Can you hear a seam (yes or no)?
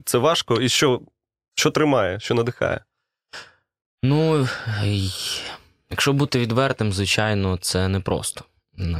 no